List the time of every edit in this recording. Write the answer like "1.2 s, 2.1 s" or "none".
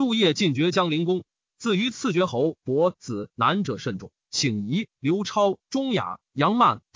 4.2 s